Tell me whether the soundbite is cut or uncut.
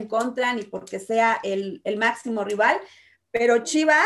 uncut